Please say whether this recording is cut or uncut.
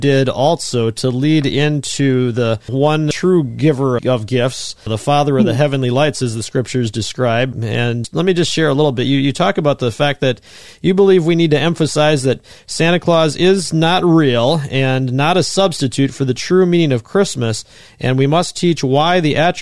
cut